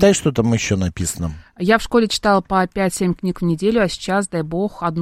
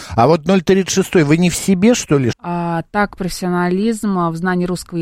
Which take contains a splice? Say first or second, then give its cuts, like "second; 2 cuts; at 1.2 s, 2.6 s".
second; 1 cut; at 2.3 s